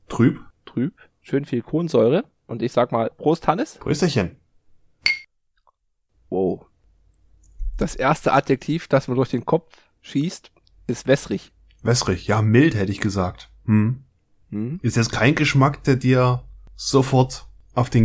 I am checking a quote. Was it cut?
no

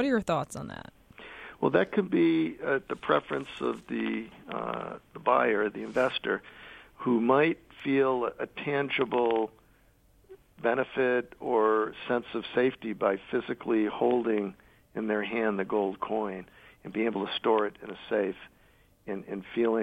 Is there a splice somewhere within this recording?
no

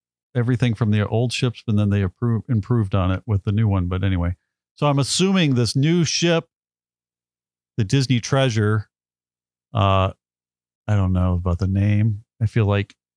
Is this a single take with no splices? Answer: yes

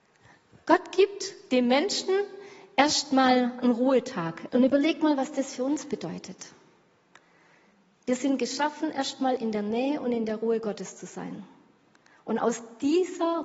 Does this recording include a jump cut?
yes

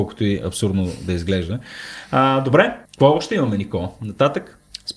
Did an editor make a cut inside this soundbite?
yes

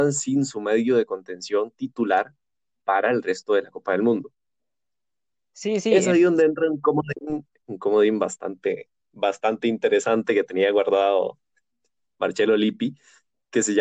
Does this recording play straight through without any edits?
yes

